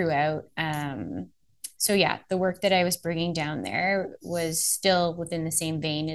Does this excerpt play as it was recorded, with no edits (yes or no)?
yes